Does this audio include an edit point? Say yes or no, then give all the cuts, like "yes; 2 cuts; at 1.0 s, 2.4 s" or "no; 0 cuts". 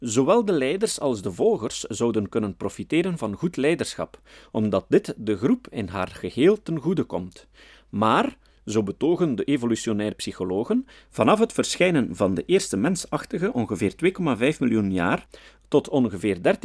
no; 0 cuts